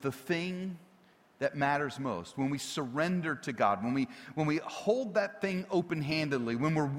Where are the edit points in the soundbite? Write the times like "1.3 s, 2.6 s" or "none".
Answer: none

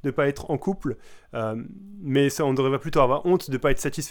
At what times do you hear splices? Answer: none

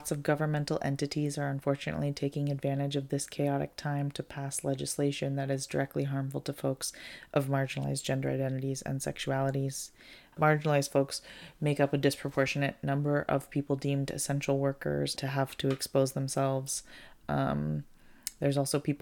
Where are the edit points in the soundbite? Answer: 10.3 s, 15.2 s

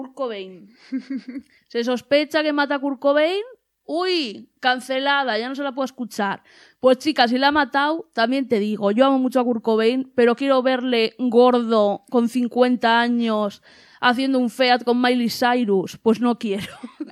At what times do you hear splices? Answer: 1.6 s

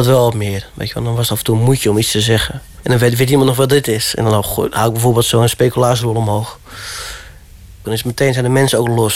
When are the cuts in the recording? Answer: 2.8 s, 7.8 s

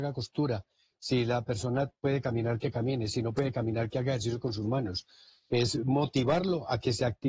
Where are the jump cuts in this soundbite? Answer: none

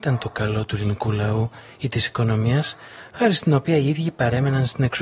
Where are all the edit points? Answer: 3.1 s

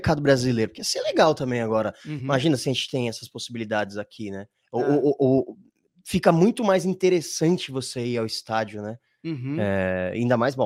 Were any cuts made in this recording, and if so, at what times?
none

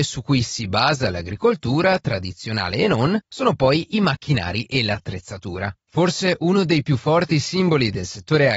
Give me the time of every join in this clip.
5.8 s

